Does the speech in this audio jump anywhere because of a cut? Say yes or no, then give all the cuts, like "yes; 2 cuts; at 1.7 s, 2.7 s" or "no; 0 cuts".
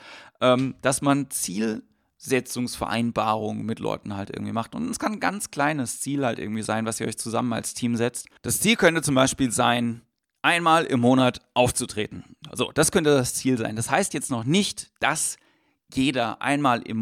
no; 0 cuts